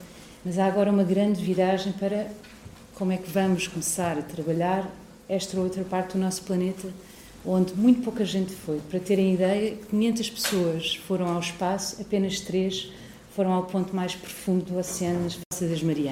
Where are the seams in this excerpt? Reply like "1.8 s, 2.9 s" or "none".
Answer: none